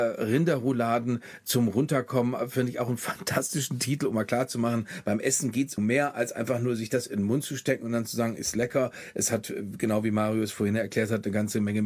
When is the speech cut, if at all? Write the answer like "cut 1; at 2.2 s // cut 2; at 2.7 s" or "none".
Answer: cut 1; at 5.8 s